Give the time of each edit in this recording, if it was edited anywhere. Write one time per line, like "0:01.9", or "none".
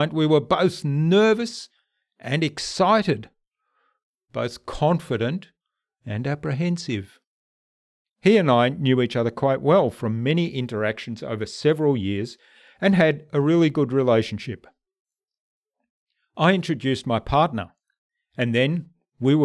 0:08.0